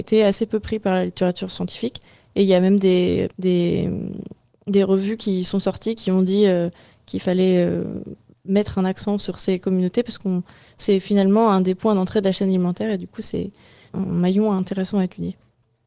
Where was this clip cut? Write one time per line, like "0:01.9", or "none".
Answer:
0:03.3
0:13.9